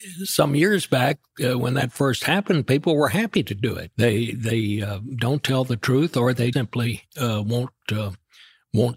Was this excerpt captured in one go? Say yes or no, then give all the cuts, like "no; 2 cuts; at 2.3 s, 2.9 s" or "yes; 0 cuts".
no; 2 cuts; at 3.9 s, 6.5 s